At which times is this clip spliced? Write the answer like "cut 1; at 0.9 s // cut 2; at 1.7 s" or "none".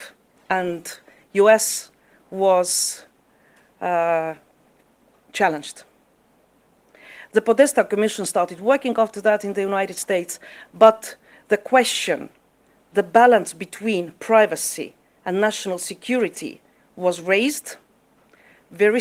none